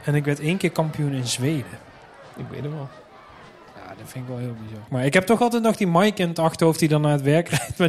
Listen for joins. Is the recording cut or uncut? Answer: cut